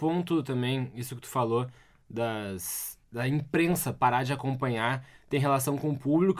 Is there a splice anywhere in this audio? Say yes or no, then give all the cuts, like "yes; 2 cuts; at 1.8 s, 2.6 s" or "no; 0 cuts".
yes; 1 cut; at 3.0 s